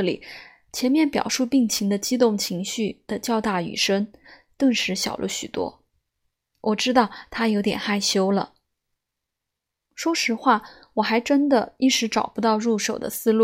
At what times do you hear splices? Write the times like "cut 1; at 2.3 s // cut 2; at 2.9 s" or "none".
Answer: cut 1; at 9.9 s